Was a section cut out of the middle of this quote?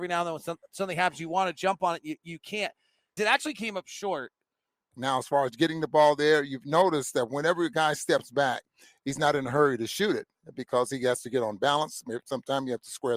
yes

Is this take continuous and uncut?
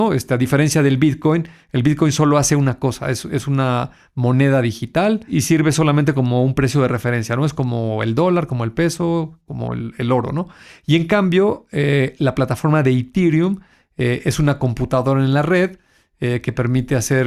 yes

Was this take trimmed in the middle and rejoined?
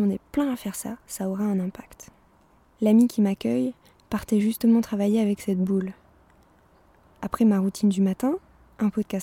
yes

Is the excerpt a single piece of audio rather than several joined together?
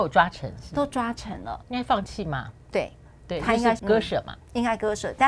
no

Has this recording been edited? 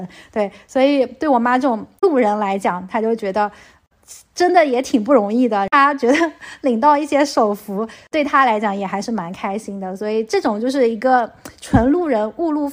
no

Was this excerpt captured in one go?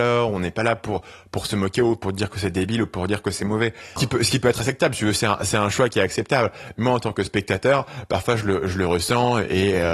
no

